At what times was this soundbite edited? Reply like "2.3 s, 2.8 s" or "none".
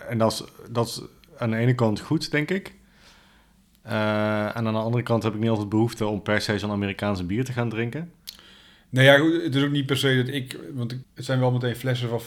11.0 s